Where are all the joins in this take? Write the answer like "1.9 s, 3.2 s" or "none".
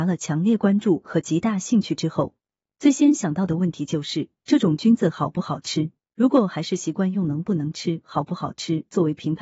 6.0 s